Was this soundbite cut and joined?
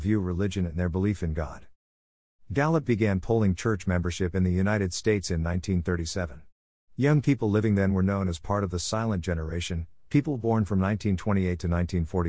no; 0 cuts

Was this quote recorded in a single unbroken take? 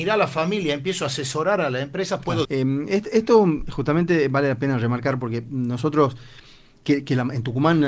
no; 1 cut; at 2.4 s

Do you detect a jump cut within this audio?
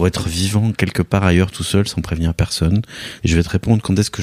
yes; 1 cut; at 3.2 s

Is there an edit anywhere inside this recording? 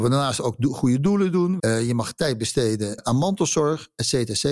yes; 2 cuts; at 1.6 s, 3.0 s

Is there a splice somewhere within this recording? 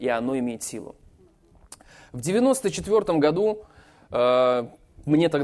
no; 0 cuts

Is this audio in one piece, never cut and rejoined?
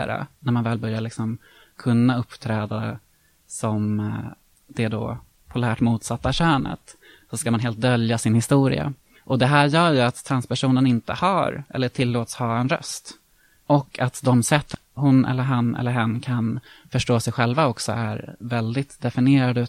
yes; 0 cuts

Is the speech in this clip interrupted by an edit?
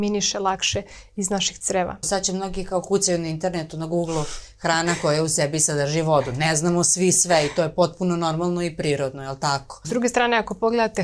yes; 2 cuts; at 2.0 s, 9.8 s

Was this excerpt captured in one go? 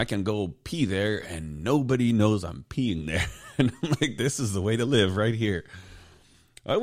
yes; 0 cuts

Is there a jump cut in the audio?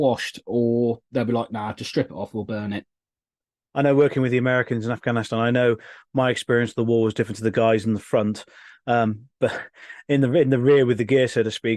no; 0 cuts

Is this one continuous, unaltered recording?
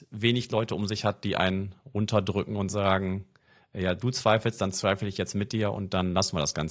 yes; 0 cuts

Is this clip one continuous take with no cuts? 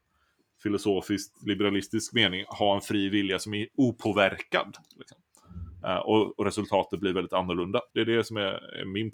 no; 2 cuts; at 5.8 s, 7.9 s

